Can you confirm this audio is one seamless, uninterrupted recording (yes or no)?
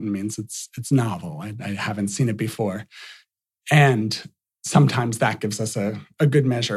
yes